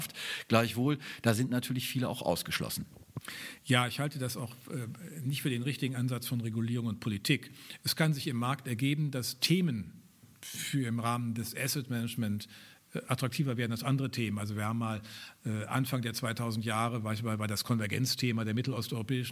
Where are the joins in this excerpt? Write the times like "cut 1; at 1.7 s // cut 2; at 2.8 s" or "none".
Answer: none